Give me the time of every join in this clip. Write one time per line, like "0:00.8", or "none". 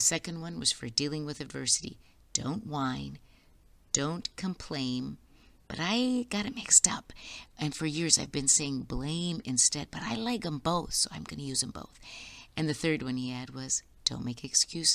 none